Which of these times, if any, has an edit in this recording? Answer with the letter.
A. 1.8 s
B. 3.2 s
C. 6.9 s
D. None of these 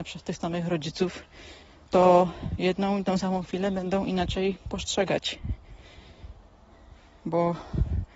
D